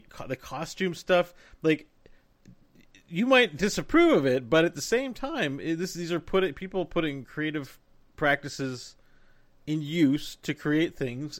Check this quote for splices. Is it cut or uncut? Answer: uncut